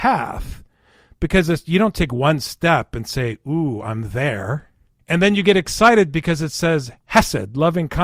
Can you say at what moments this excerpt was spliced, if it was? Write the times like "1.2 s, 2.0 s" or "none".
5.0 s